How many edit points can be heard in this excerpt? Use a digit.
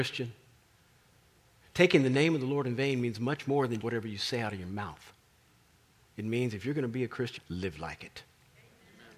2